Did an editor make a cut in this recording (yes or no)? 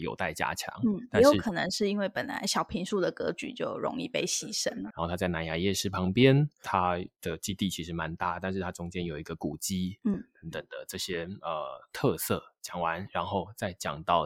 yes